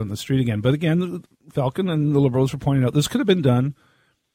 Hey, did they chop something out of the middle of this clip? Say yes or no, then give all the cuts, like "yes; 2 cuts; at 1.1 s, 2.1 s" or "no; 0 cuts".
no; 0 cuts